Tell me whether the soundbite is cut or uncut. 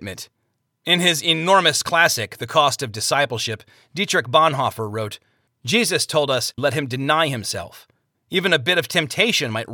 cut